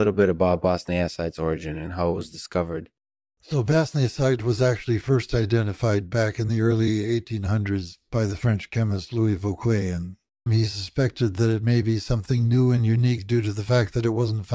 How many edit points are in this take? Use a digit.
1